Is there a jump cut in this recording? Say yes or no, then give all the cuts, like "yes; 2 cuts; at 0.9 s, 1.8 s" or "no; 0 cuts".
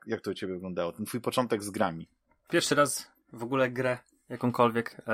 no; 0 cuts